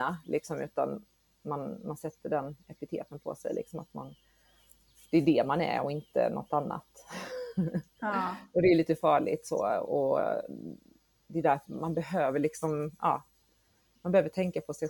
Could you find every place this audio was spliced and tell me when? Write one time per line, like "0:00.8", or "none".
0:11.7

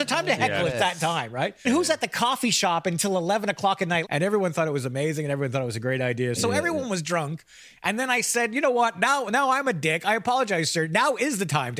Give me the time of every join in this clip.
0:01.6
0:04.0
0:06.4

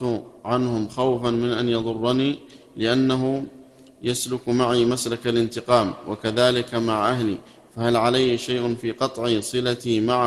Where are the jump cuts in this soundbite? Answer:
none

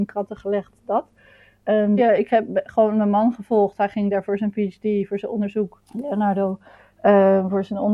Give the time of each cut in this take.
0:02.0
0:05.9

